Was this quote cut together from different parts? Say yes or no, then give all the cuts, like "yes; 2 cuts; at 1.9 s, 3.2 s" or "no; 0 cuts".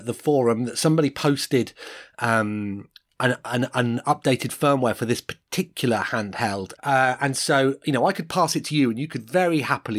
yes; 1 cut; at 6.8 s